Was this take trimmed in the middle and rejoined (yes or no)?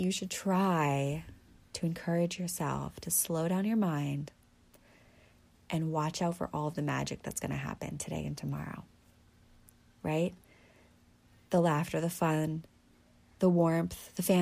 no